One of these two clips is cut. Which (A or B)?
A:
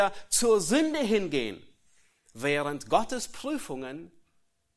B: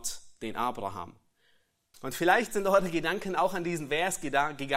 B